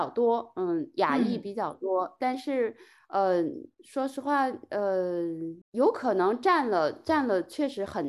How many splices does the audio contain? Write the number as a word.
one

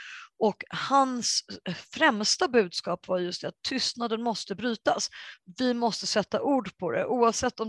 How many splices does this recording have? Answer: zero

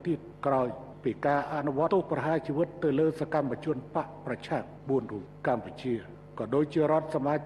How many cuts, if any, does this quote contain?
one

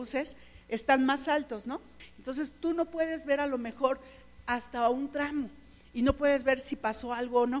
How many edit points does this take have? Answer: one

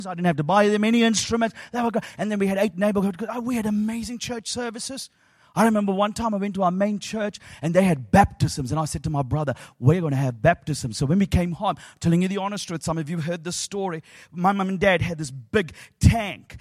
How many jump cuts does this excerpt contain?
zero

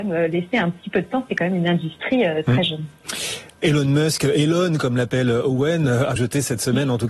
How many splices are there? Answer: one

